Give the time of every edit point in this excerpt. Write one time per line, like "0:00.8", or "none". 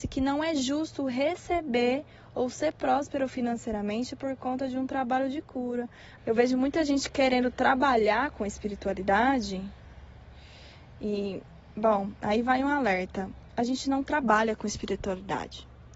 0:06.2